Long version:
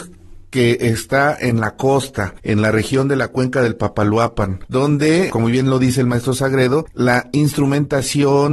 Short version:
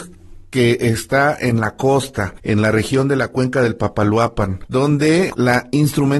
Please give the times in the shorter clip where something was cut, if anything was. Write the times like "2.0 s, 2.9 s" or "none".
5.3 s